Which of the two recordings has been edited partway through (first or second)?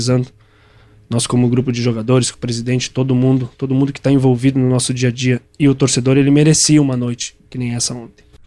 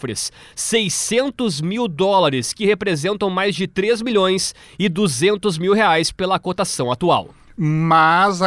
first